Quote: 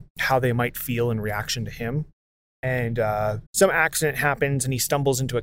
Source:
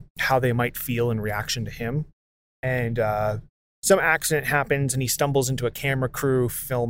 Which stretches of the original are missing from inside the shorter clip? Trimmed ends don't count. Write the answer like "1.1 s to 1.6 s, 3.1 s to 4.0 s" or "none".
3.5 s to 3.7 s